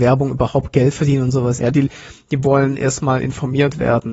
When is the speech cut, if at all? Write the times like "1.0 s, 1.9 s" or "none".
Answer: 1.6 s